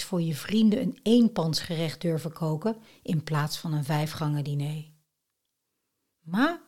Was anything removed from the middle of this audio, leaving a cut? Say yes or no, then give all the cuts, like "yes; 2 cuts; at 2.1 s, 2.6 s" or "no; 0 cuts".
no; 0 cuts